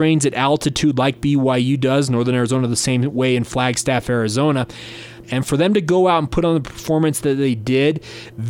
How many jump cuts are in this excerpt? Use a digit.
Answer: 1